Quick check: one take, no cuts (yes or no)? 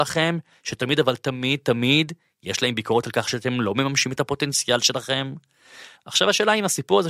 no